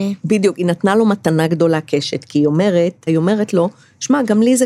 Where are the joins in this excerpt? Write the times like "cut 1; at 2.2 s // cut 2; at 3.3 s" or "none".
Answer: cut 1; at 3.1 s